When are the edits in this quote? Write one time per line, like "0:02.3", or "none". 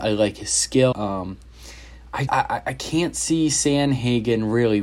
0:00.9
0:02.3